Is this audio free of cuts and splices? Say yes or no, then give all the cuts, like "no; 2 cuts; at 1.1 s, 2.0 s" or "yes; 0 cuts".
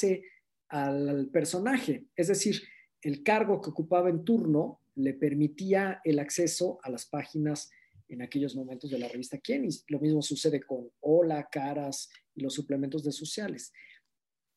yes; 0 cuts